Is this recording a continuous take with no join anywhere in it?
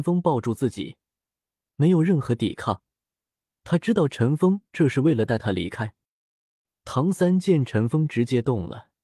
yes; 0 cuts

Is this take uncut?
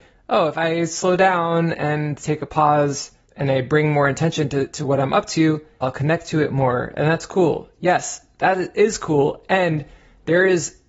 no; 1 cut; at 5.8 s

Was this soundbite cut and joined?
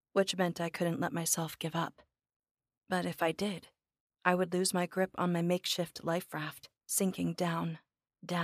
yes; 2 cuts; at 2.8 s, 6.8 s

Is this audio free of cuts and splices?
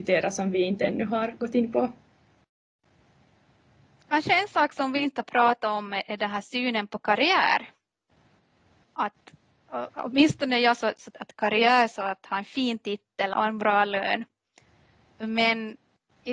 no; 3 cuts; at 8.8 s, 11.1 s, 13.3 s

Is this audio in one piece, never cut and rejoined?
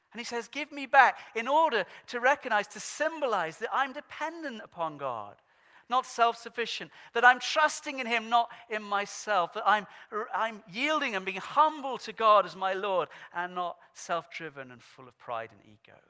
yes; 0 cuts

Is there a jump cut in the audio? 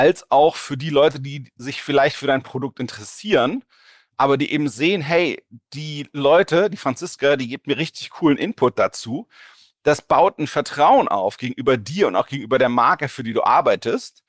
no; 0 cuts

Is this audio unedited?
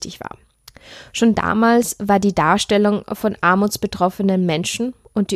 yes; 0 cuts

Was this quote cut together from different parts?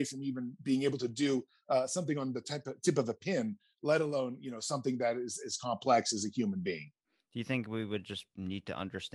no; 0 cuts

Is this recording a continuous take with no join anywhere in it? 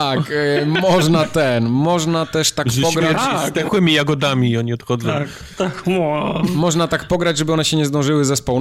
yes; 0 cuts

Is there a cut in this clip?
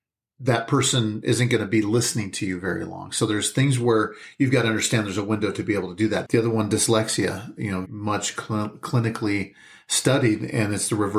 yes; 2 cuts; at 6.2 s, 7.8 s

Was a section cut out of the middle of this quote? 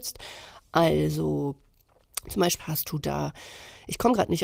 yes; 1 cut; at 2.6 s

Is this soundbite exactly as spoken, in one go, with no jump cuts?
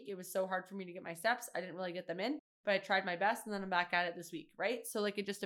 yes; 0 cuts

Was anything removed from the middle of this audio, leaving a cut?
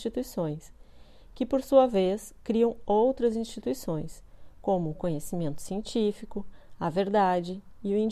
no; 0 cuts

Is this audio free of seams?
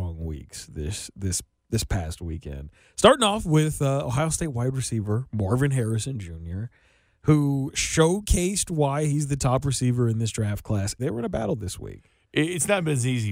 no; 1 cut; at 11.0 s

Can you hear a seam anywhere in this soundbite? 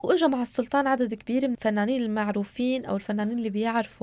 yes; 1 cut; at 1.5 s

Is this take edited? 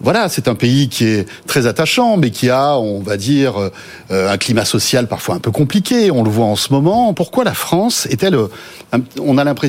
yes; 1 cut; at 7.1 s

